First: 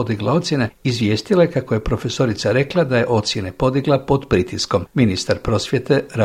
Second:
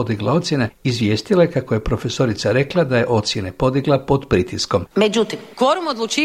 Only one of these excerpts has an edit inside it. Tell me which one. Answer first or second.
second